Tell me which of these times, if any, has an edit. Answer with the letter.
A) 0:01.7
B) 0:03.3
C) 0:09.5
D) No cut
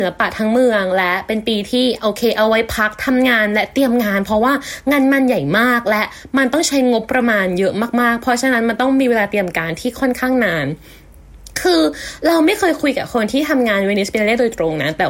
D